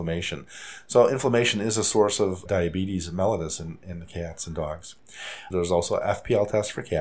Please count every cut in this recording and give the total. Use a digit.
2